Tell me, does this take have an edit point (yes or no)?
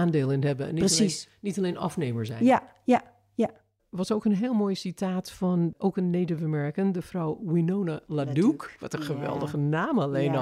no